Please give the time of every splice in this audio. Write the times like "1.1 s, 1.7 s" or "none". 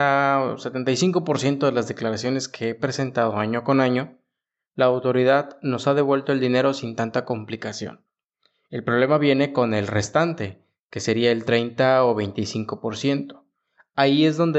none